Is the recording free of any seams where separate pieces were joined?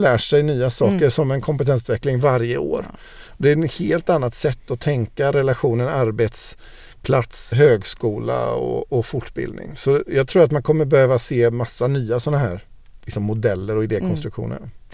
no; 1 cut; at 7.5 s

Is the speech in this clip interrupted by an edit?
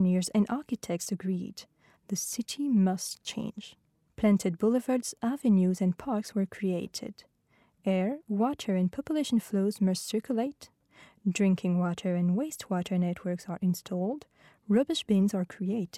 yes; 1 cut; at 4.1 s

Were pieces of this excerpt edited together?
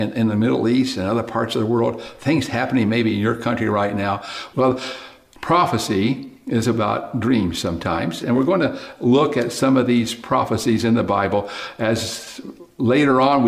yes; 2 cuts; at 4.5 s, 8.2 s

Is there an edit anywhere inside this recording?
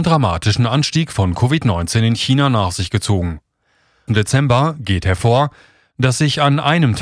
yes; 1 cut; at 4.1 s

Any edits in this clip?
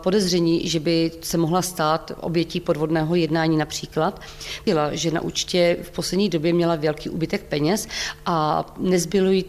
yes; 1 cut; at 4.7 s

